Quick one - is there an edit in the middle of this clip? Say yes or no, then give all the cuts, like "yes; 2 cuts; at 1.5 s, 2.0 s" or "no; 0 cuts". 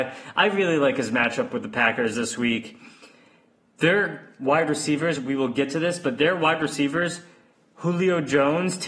no; 0 cuts